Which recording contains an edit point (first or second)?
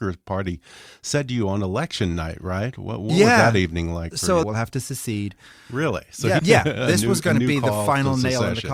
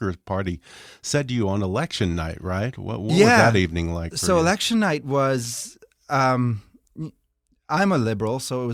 first